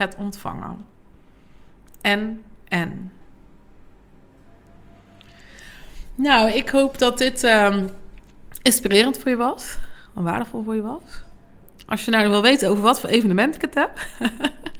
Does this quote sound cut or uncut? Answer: uncut